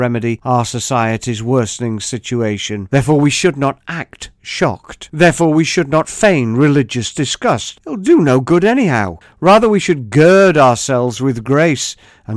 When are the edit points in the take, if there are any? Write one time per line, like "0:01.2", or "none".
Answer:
0:02.9
0:09.2